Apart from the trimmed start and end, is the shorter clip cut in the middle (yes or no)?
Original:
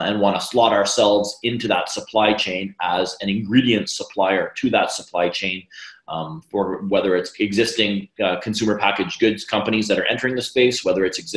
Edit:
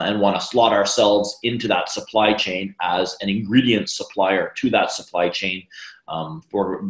no